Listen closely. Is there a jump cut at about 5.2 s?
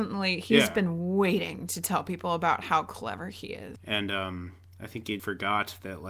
yes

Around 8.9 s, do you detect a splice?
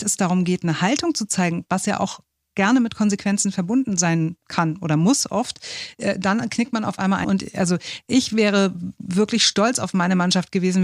no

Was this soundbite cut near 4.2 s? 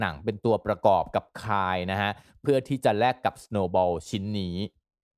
no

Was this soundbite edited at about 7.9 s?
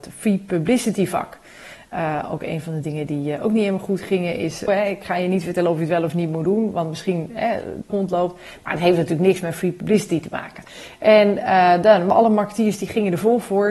yes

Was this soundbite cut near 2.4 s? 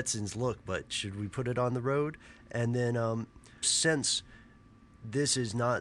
no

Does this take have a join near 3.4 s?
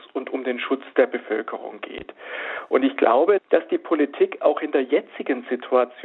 yes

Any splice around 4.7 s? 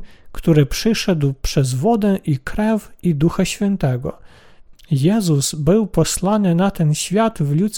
yes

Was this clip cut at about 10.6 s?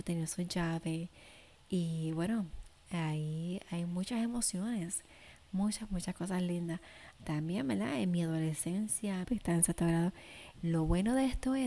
yes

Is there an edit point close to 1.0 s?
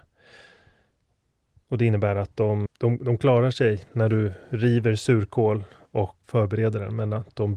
no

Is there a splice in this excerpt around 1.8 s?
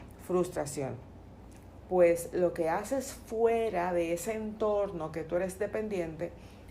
yes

